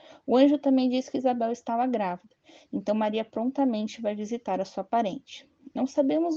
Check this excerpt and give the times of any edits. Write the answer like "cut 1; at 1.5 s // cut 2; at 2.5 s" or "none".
none